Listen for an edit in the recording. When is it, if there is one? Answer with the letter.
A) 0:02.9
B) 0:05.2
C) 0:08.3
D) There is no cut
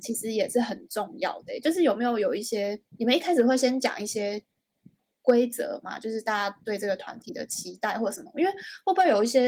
A